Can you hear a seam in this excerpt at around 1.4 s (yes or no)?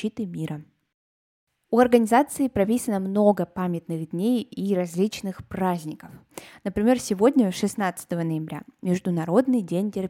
no